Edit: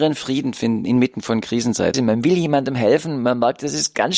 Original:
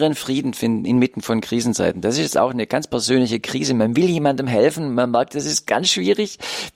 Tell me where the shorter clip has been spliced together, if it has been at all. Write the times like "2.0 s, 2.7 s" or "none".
1.9 s